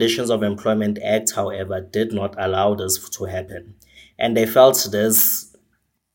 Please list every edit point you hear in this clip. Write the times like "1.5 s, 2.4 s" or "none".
none